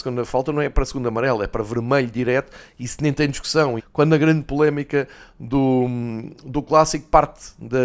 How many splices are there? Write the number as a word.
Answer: one